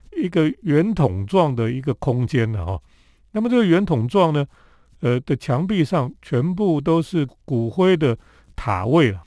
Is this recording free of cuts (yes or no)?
yes